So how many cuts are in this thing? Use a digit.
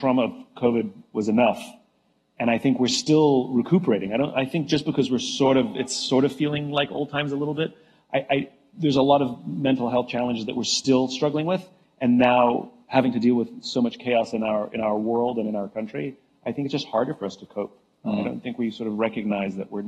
0